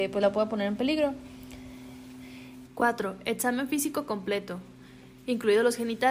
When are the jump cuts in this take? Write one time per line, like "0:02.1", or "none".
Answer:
0:02.7